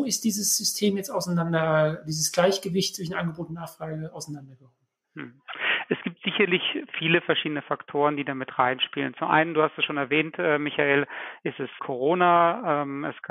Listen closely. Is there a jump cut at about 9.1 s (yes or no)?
no